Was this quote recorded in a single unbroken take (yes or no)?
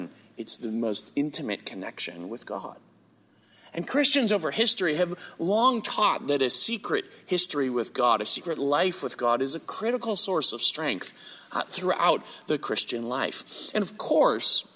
yes